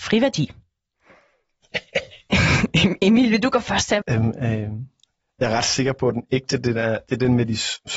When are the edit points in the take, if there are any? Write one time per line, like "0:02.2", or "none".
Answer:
0:04.0